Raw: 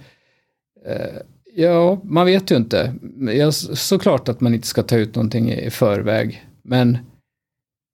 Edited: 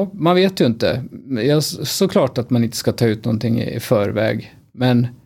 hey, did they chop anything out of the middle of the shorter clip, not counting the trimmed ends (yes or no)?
no